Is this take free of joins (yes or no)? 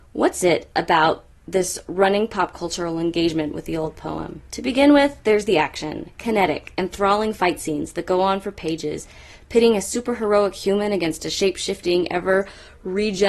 yes